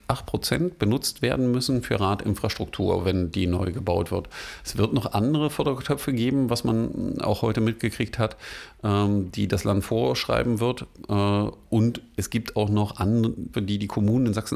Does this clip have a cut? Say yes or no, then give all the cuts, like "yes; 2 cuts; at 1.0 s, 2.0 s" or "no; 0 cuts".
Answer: yes; 1 cut; at 13.5 s